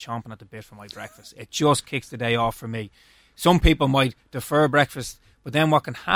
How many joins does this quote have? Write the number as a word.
zero